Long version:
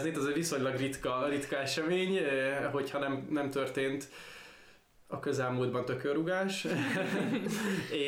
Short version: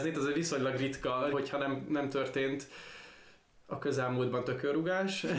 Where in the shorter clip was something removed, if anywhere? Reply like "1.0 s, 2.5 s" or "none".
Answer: 1.3 s